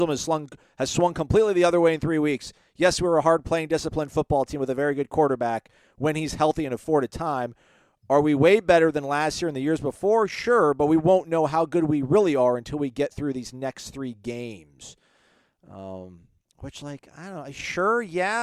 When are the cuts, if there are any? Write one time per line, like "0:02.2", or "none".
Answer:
none

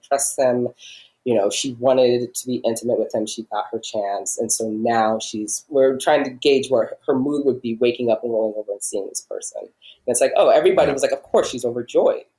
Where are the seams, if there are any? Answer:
none

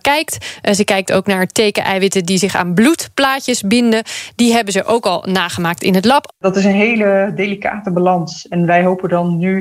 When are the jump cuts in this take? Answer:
0:06.3

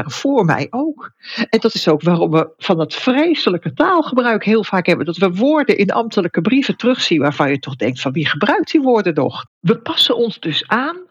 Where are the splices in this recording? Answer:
0:09.5

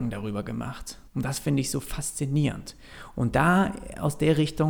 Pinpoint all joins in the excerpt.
0:01.1

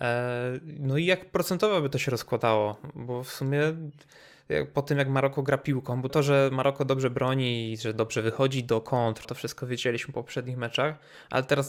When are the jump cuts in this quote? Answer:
0:06.1
0:09.2

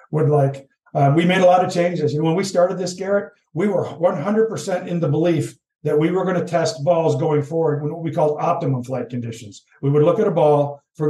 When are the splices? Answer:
none

